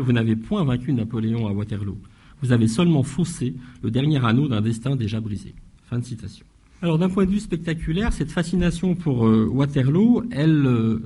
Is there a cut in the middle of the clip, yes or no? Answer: no